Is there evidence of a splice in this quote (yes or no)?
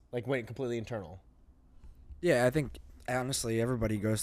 no